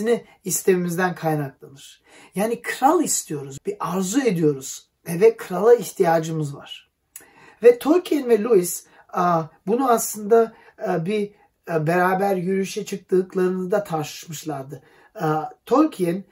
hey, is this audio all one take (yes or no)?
no